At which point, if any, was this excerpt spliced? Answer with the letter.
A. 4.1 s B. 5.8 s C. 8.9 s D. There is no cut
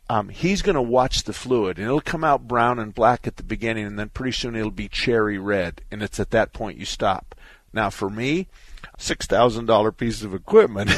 C